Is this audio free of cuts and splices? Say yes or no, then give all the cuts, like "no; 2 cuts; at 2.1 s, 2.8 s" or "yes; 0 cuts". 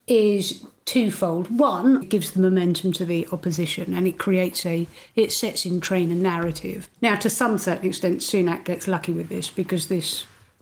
no; 2 cuts; at 2.0 s, 6.8 s